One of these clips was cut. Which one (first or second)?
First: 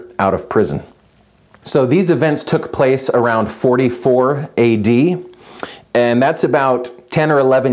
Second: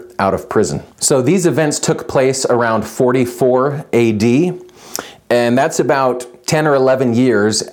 second